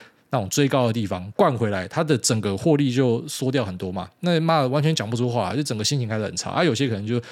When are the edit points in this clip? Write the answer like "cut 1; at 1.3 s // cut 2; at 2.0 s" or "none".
none